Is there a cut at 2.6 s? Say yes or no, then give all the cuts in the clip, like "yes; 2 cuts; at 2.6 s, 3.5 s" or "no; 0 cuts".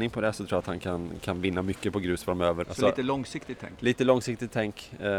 yes; 1 cut; at 2.6 s